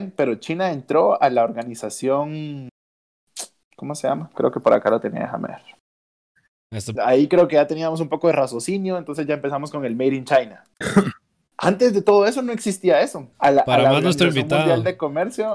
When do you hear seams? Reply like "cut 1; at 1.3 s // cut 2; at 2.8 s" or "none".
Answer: cut 1; at 7.0 s // cut 2; at 13.3 s